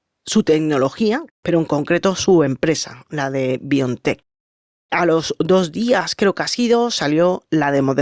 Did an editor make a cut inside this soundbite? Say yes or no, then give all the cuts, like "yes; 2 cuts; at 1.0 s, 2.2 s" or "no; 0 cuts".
yes; 1 cut; at 1.3 s